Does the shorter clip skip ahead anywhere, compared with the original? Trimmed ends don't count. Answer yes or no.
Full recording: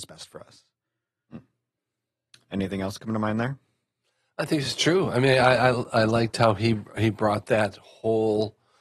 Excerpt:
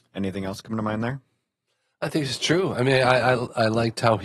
no